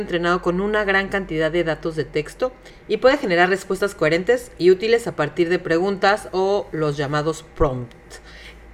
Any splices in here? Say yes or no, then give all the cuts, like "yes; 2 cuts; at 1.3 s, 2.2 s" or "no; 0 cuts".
no; 0 cuts